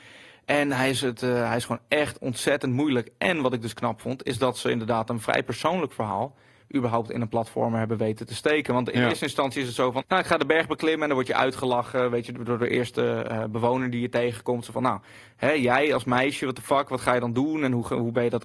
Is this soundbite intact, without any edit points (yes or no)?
no